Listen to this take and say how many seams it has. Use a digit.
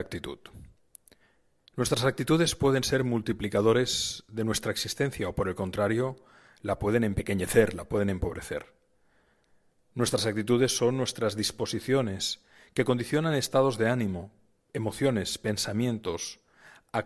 0